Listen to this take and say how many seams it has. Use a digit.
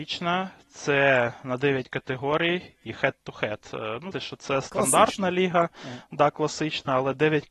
1